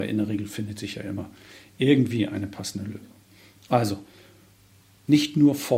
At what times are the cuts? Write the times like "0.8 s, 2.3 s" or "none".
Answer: none